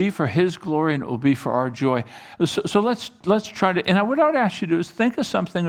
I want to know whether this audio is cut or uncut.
uncut